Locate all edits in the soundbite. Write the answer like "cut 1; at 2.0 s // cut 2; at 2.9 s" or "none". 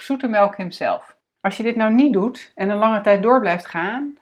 cut 1; at 1.2 s